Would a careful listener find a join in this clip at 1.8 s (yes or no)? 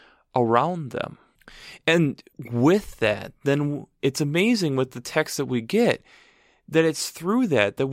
no